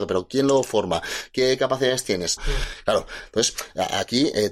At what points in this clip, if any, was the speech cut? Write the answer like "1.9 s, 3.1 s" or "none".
2.4 s